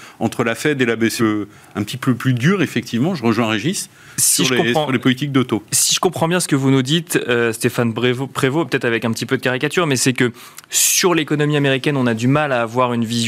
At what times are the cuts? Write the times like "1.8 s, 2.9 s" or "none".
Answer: 1.2 s

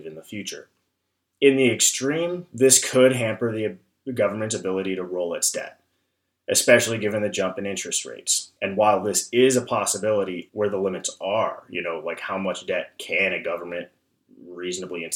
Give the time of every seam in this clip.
8.6 s, 10.5 s

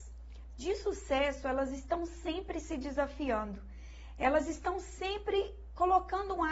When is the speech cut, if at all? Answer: none

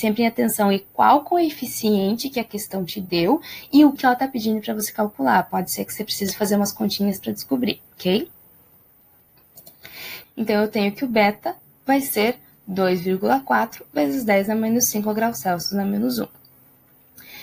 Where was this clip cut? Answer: 4.0 s, 10.2 s

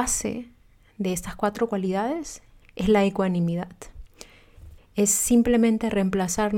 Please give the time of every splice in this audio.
2.6 s, 4.8 s

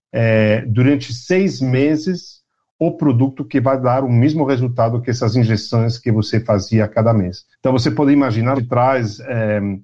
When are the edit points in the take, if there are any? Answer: 7.5 s, 8.5 s

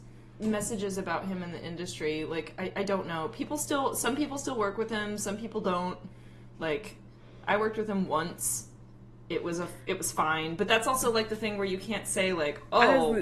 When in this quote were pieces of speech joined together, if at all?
none

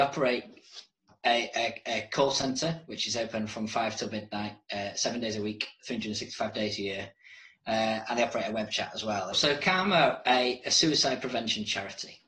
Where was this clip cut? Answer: 9.3 s

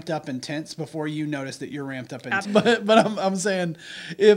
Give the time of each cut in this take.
2.4 s

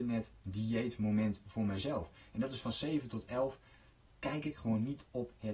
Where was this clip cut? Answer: none

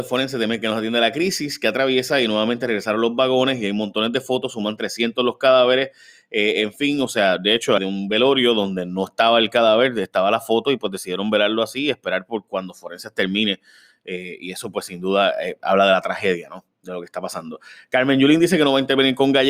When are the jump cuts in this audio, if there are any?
7.8 s

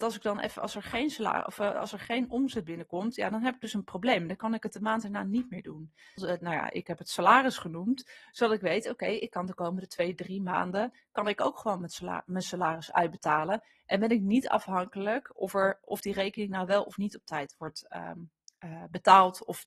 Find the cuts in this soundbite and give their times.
6.2 s

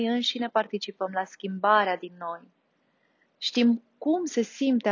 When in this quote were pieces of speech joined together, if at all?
3.3 s

